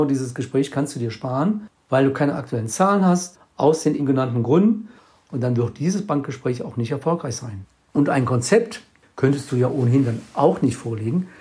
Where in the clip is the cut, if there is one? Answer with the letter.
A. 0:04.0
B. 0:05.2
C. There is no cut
A